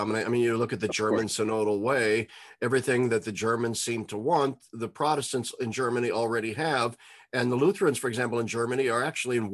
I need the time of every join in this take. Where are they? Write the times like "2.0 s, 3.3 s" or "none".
none

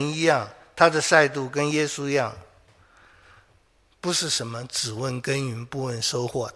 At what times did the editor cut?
none

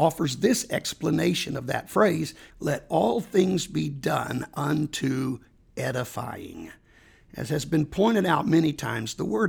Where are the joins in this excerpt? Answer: 2.5 s

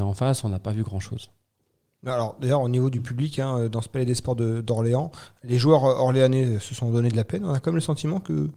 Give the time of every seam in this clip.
none

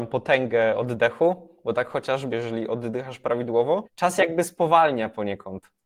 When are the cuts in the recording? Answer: 2.3 s, 3.8 s

